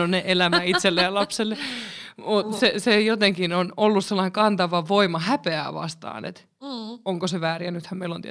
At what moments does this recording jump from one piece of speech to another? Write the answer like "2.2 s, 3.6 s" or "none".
none